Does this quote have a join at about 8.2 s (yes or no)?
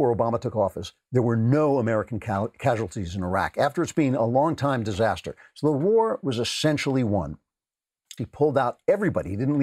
yes